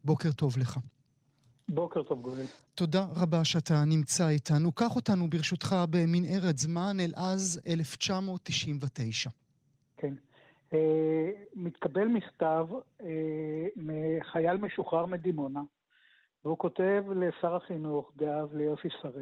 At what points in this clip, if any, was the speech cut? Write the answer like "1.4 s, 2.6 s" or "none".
none